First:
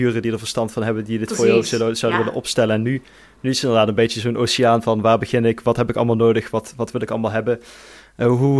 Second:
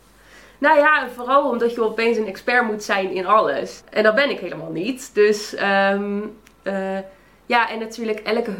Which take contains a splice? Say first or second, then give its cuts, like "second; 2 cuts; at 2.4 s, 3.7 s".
second; 1 cut; at 3.8 s